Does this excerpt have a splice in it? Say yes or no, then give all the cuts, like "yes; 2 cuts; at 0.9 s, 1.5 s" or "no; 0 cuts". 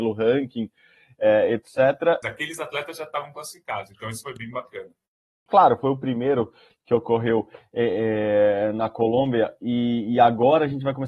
yes; 2 cuts; at 2.2 s, 5.5 s